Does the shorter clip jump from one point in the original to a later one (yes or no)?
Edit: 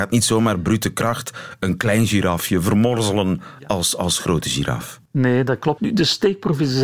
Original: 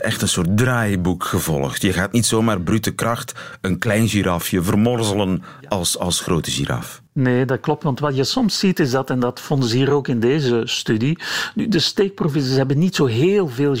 yes